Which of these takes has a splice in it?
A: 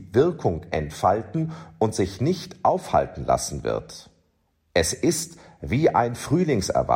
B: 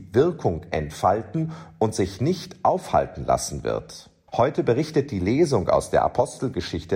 B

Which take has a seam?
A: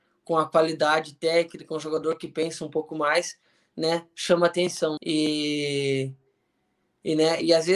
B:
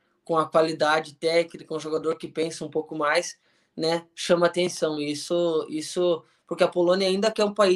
A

